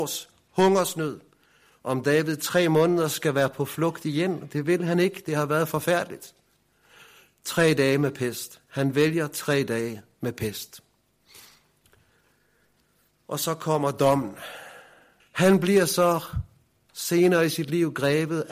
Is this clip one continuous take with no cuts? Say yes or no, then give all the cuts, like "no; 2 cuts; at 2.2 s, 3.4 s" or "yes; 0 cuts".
no; 1 cut; at 15.2 s